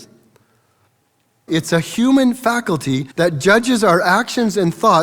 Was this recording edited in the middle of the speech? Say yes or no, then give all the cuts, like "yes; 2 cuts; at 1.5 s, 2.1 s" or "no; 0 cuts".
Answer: yes; 2 cuts; at 1.5 s, 3.1 s